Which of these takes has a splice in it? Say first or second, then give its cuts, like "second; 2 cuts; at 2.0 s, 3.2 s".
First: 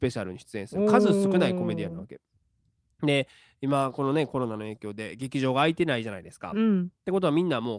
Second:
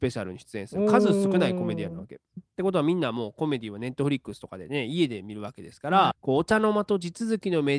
second; 2 cuts; at 2.4 s, 6.1 s